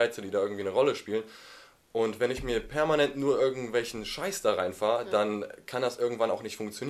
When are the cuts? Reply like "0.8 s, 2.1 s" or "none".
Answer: none